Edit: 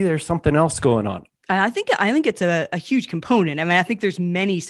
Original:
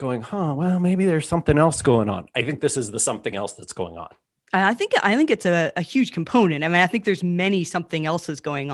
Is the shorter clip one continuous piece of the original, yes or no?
no